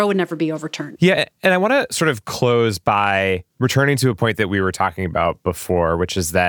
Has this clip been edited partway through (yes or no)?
yes